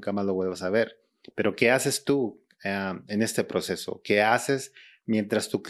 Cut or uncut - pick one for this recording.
uncut